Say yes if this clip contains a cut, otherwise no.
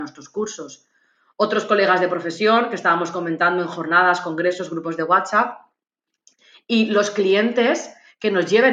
no